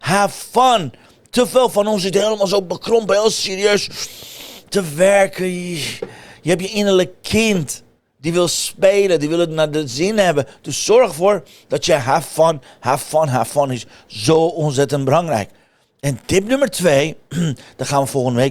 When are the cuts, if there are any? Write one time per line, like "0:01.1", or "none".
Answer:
none